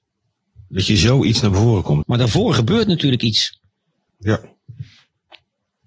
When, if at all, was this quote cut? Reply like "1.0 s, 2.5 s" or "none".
2.0 s, 4.1 s